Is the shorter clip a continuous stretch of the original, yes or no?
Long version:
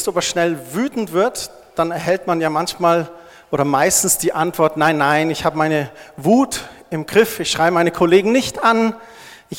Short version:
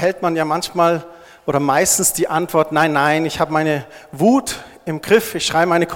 yes